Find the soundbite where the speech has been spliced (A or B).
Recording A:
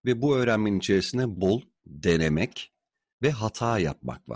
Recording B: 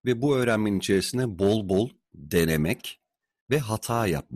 A